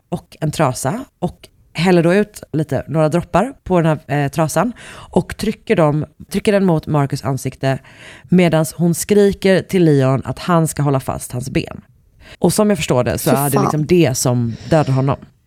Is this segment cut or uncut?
cut